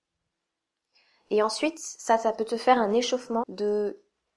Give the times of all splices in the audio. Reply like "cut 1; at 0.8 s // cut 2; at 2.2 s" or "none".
cut 1; at 3.4 s